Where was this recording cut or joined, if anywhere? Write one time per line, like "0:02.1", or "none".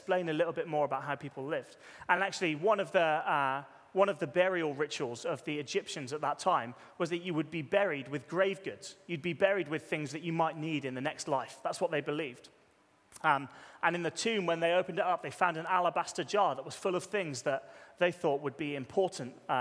none